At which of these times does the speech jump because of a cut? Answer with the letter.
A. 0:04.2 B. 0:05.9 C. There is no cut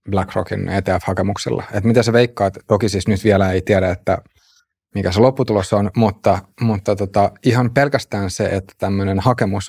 C